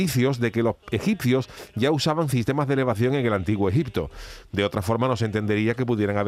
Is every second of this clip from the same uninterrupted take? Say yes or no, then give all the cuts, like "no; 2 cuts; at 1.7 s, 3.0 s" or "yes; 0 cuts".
yes; 0 cuts